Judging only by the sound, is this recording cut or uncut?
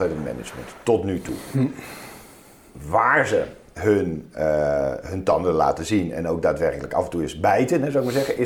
uncut